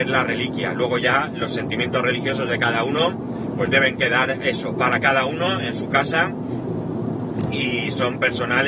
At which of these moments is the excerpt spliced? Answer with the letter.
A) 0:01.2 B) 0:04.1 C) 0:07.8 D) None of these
D